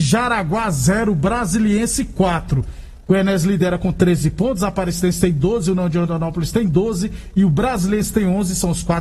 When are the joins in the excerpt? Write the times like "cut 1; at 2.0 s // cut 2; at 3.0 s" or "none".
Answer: none